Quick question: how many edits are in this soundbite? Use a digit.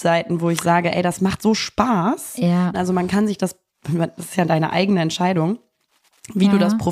1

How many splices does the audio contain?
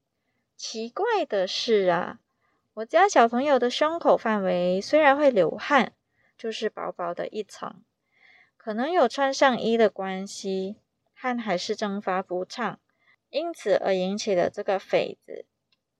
1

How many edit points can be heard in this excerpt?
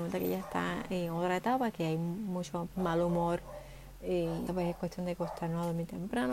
2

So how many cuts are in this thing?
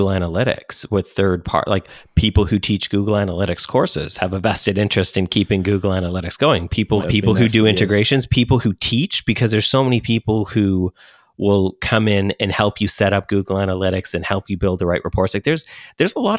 1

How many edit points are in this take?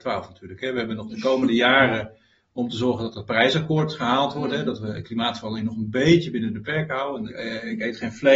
2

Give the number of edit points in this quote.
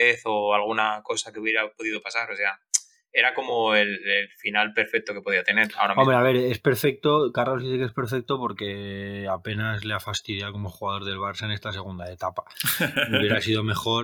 0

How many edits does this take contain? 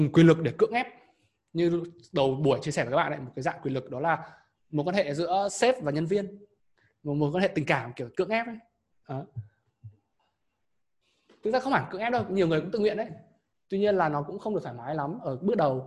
0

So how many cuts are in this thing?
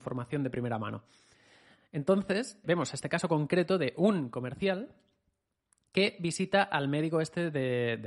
1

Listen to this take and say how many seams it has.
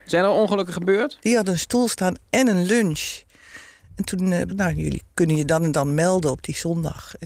2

